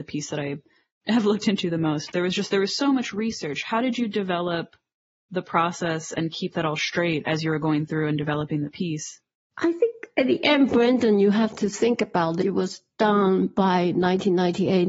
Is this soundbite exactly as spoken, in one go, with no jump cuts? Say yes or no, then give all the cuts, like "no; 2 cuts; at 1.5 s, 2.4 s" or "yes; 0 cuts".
no; 1 cut; at 2.1 s